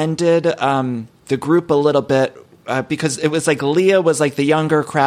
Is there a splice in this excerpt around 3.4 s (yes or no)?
no